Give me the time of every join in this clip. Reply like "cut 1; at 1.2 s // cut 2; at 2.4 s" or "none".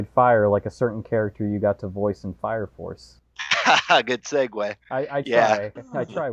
none